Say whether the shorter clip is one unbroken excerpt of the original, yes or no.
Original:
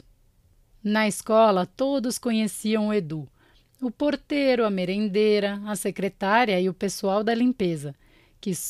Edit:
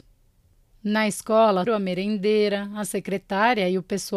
no